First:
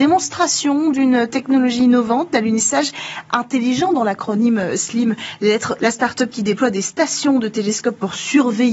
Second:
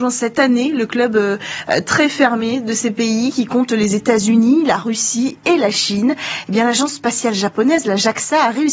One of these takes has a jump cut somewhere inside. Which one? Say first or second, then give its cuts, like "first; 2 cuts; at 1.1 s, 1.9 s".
first; 1 cut; at 5.8 s